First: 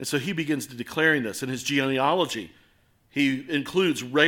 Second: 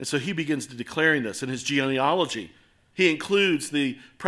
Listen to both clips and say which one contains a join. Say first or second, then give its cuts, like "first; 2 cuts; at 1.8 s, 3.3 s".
second; 1 cut; at 2.9 s